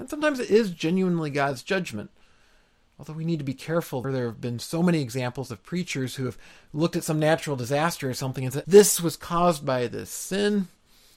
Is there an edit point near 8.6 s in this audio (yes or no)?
yes